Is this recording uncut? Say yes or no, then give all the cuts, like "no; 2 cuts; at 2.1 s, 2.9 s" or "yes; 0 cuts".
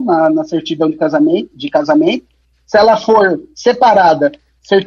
no; 1 cut; at 1.5 s